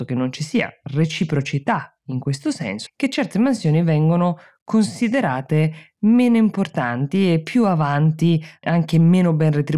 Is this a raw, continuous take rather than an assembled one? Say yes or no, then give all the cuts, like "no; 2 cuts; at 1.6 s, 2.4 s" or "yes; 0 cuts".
no; 1 cut; at 2.9 s